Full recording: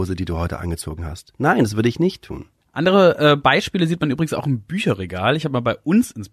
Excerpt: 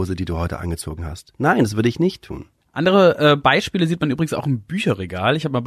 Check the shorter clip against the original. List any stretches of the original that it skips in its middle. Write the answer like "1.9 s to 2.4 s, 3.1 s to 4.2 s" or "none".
none